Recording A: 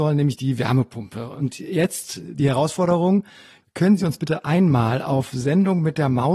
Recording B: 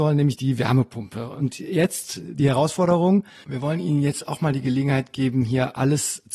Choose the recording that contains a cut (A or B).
B